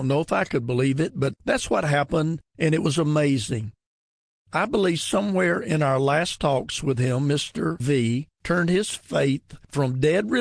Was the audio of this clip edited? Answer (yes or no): no